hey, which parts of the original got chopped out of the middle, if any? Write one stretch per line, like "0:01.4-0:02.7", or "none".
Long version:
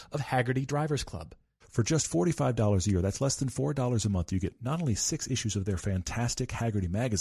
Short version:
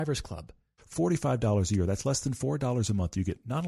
0:01.8-0:02.1